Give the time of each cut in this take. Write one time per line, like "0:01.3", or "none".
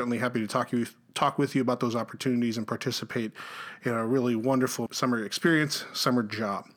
0:04.9